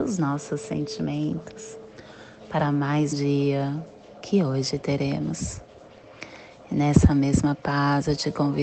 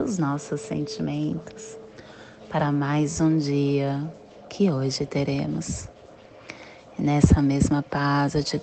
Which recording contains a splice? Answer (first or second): first